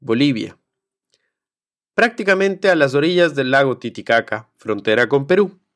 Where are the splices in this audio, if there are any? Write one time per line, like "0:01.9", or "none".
none